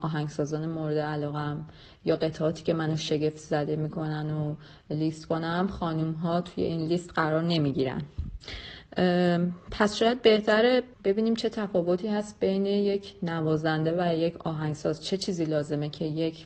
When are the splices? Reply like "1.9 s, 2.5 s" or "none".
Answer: 10.9 s